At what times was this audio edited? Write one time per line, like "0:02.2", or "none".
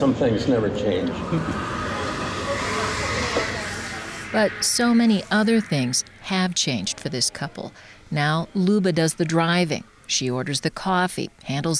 none